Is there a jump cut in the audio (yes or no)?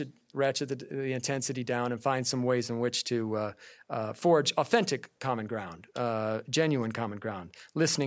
no